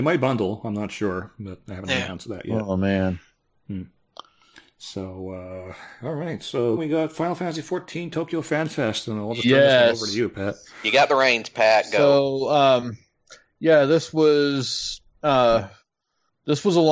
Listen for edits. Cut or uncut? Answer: cut